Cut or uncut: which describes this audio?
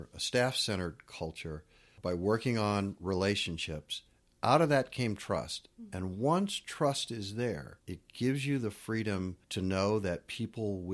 cut